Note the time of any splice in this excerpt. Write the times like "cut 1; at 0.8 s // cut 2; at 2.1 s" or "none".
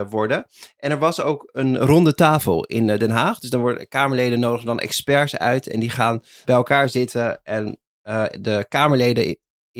cut 1; at 6.4 s